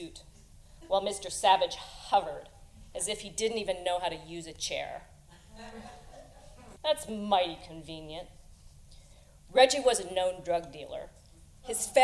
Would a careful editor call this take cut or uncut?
cut